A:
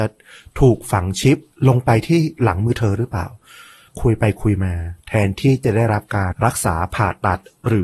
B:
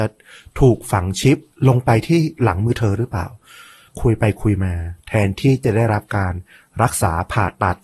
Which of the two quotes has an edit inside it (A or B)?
A